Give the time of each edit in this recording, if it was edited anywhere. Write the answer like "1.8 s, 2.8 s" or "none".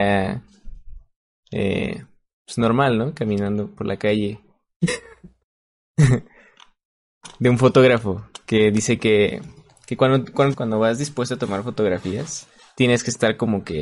10.5 s